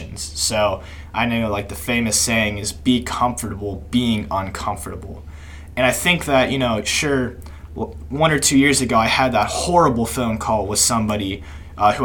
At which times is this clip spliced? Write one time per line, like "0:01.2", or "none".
none